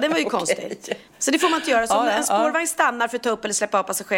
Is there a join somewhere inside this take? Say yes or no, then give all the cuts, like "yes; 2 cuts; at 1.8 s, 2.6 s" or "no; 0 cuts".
yes; 1 cut; at 1.1 s